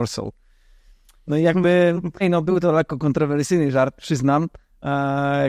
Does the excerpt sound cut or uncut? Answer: cut